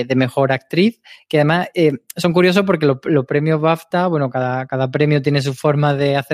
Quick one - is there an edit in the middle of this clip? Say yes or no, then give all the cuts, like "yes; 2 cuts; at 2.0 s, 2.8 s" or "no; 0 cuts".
no; 0 cuts